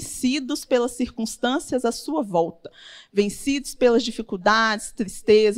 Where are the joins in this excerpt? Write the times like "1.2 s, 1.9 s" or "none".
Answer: none